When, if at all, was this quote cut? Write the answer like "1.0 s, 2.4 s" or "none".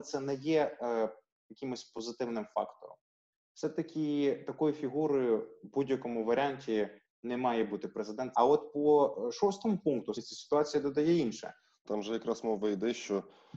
8.3 s, 10.1 s, 11.8 s